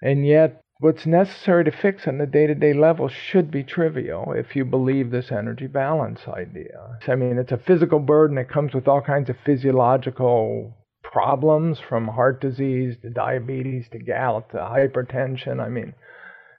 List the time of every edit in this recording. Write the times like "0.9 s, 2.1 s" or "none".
7.0 s